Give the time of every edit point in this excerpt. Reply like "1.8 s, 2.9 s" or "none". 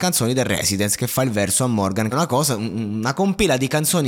2.1 s